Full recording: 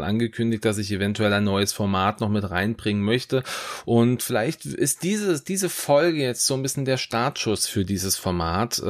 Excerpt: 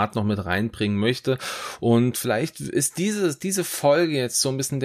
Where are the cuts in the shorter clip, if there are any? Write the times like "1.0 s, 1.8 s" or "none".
none